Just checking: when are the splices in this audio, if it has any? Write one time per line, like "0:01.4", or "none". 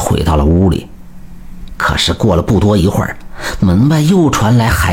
0:01.7